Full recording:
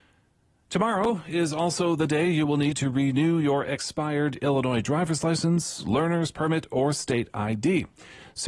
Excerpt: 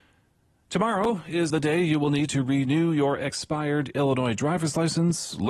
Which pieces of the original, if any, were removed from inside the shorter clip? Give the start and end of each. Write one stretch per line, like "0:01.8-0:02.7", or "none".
0:01.5-0:02.0